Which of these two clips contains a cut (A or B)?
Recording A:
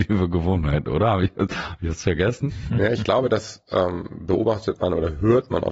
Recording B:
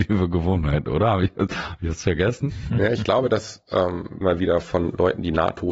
B